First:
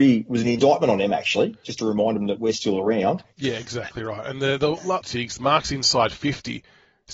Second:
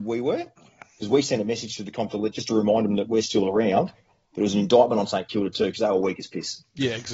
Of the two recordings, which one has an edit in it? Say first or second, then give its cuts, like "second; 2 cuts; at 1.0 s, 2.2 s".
first; 3 cuts; at 1.6 s, 3.3 s, 5.0 s